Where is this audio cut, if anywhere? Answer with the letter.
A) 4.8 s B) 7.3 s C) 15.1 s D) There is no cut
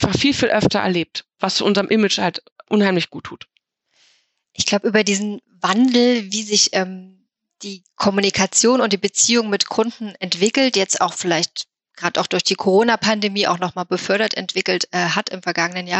D